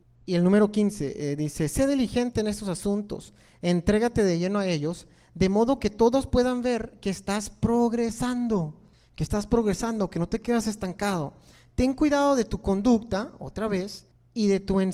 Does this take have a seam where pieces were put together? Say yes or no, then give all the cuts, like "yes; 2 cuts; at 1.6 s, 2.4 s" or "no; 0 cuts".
no; 0 cuts